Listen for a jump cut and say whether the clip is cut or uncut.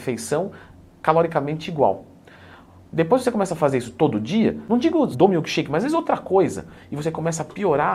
cut